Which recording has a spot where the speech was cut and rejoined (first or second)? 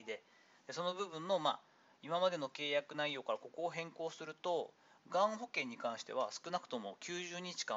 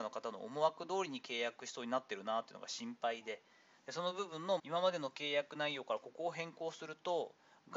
second